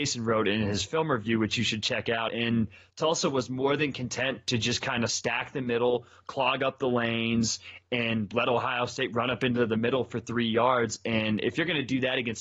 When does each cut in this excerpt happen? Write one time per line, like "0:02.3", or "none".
0:02.3